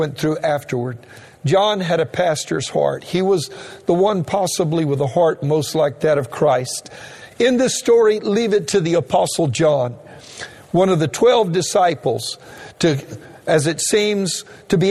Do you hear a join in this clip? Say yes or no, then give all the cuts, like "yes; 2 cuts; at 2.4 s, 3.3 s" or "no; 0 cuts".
yes; 1 cut; at 7.3 s